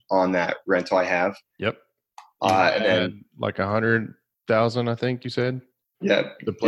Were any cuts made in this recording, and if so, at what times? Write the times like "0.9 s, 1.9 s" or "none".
none